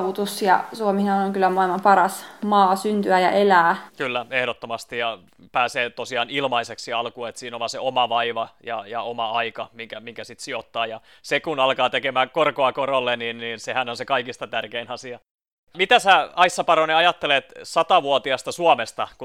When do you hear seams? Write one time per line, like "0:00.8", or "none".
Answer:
0:03.9